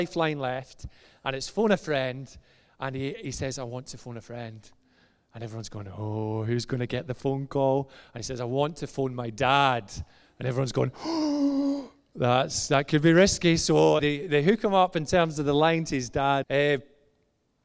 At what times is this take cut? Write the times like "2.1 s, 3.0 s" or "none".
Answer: 14.0 s, 16.4 s